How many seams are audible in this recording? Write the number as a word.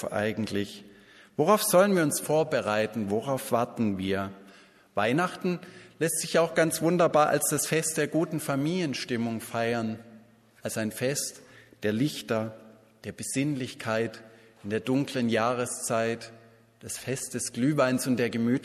zero